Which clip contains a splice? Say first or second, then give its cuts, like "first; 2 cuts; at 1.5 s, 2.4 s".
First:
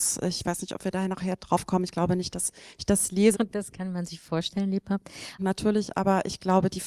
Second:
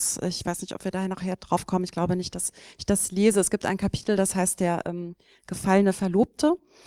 first; 2 cuts; at 3.3 s, 5.4 s